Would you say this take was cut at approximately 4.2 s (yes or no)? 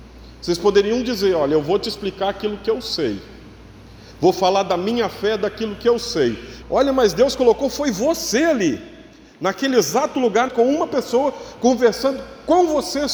no